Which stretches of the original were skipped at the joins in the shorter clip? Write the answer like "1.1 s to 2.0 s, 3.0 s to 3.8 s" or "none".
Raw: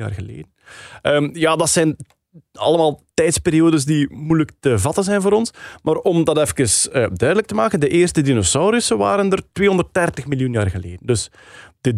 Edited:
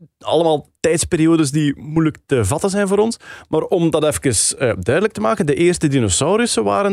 none